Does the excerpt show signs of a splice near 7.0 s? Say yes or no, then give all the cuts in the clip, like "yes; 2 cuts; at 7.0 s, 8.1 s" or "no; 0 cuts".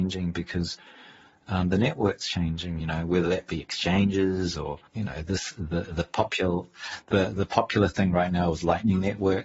no; 2 cuts; at 2.8 s, 4.9 s